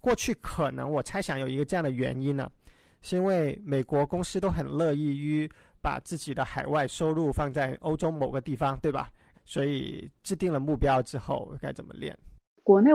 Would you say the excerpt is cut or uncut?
cut